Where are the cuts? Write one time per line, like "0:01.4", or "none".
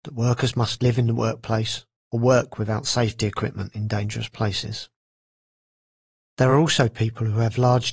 none